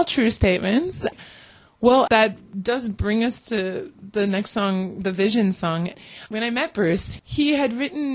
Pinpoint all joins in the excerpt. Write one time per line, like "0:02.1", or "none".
0:02.1

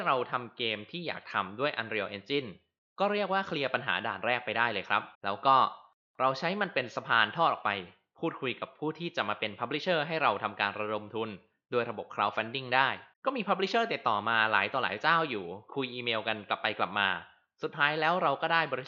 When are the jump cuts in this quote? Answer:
0:05.1
0:13.1

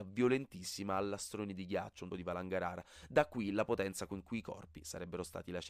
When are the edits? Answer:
0:02.1

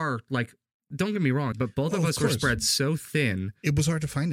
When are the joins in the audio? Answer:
0:01.5

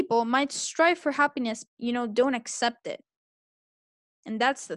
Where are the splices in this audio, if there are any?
0:01.7

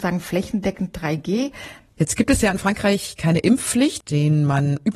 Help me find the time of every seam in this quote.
0:01.8
0:04.0

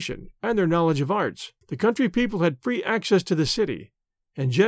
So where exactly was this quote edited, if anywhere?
0:01.6

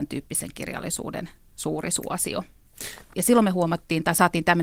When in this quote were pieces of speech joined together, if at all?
0:03.1

